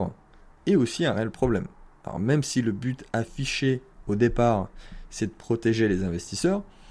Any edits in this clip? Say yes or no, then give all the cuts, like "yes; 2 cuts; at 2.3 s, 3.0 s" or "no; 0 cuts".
no; 0 cuts